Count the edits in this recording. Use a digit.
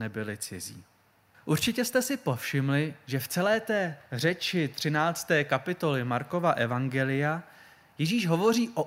1